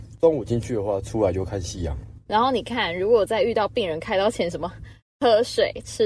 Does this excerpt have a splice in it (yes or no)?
yes